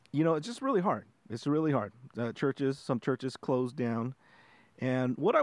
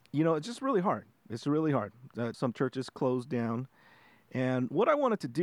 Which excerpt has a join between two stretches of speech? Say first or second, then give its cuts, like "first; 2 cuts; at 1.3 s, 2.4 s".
second; 1 cut; at 2.3 s